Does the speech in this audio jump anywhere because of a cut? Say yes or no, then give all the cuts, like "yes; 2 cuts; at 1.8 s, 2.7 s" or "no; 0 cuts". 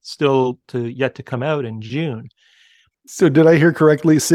yes; 1 cut; at 2.9 s